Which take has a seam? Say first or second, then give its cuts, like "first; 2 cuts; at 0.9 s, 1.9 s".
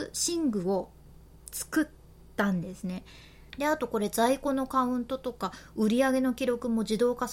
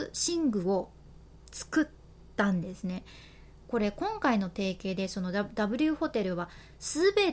first; 1 cut; at 3.5 s